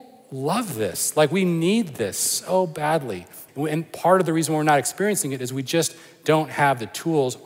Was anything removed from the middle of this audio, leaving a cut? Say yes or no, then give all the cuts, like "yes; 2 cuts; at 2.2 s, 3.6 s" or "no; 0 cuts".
yes; 1 cut; at 3.5 s